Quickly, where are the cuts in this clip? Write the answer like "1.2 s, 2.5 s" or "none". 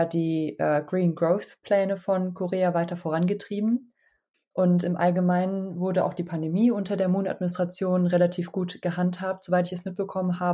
4.3 s